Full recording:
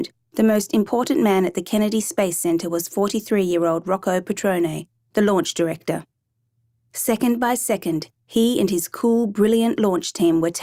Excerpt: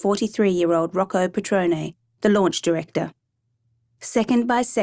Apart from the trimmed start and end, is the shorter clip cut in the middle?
no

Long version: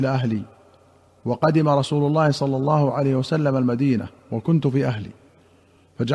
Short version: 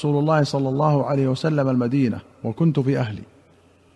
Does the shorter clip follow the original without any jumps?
yes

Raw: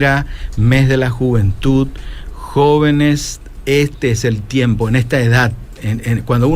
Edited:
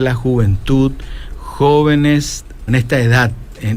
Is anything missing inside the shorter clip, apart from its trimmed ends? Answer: yes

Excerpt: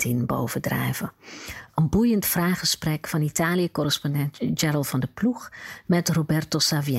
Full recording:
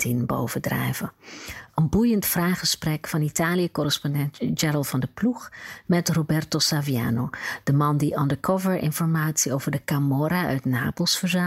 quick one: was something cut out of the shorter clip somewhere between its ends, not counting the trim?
no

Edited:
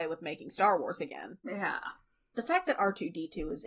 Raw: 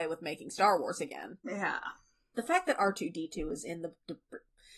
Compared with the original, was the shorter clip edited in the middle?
no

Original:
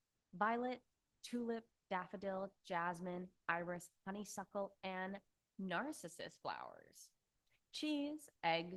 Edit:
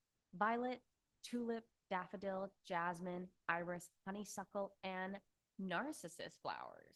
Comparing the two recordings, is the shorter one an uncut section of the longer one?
yes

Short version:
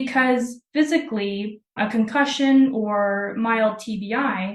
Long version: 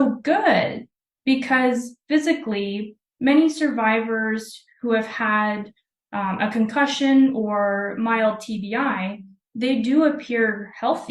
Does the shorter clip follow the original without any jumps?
no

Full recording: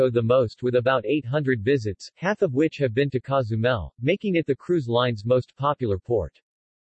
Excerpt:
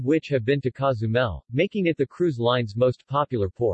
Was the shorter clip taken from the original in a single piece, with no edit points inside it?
yes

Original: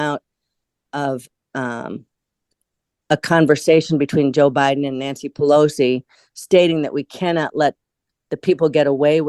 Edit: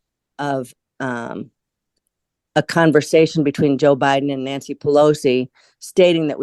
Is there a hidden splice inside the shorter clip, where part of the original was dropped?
no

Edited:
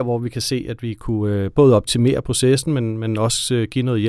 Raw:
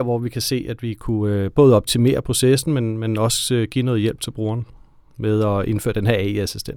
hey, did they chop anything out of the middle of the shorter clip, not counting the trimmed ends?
no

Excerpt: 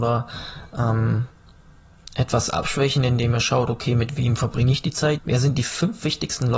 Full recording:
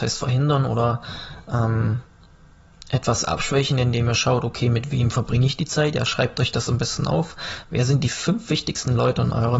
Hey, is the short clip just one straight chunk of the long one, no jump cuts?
no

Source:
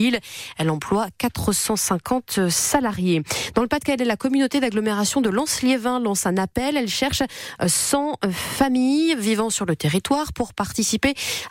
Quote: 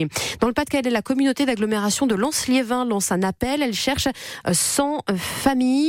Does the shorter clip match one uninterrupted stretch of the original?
yes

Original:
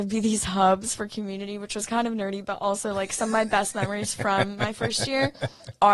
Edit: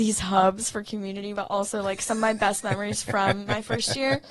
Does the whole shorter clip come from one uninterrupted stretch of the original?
no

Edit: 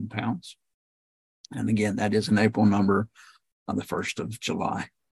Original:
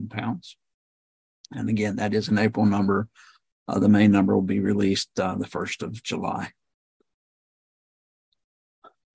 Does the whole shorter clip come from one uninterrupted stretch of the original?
no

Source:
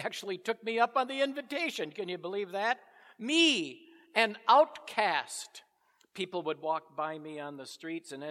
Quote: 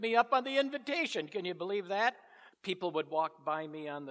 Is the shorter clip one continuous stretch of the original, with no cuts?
no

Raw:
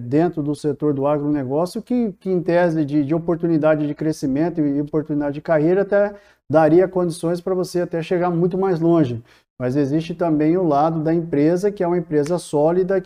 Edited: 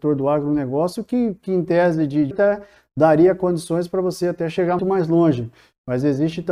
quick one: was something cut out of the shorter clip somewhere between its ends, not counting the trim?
yes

